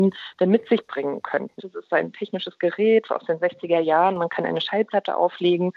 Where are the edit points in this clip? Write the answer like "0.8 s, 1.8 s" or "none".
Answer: 1.6 s